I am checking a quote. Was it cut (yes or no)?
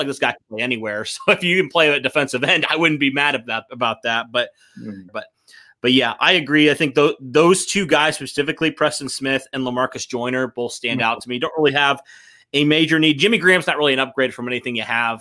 yes